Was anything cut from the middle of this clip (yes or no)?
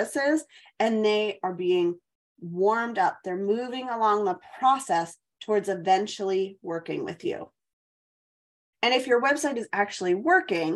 yes